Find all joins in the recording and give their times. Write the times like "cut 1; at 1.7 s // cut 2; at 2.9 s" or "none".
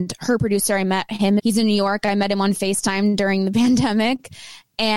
cut 1; at 1.4 s